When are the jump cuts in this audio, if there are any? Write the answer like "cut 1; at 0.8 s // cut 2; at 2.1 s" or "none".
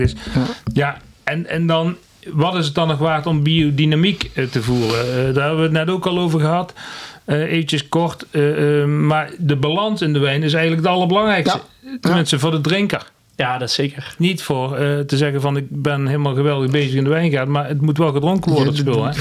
cut 1; at 14.2 s